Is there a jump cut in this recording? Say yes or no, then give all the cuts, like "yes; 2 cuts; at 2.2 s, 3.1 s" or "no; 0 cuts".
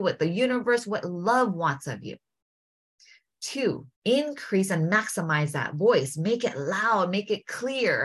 yes; 1 cut; at 3.9 s